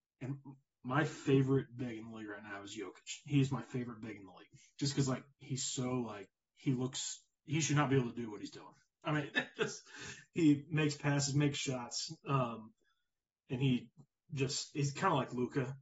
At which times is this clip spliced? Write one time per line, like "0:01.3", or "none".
0:09.3